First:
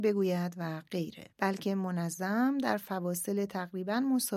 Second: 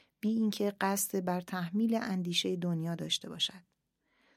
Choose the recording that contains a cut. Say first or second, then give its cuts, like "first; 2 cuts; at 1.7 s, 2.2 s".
first; 1 cut; at 1.3 s